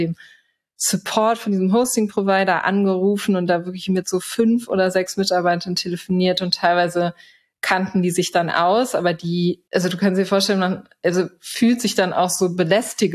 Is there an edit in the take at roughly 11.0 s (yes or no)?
no